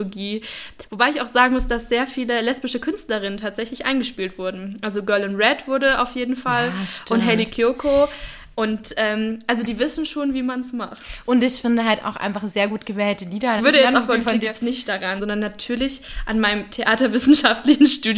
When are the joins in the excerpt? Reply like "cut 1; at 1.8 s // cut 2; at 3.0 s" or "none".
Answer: cut 1; at 13.6 s // cut 2; at 15.2 s